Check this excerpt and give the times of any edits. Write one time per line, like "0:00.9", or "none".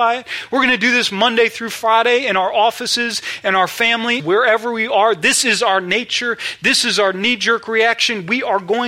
0:04.2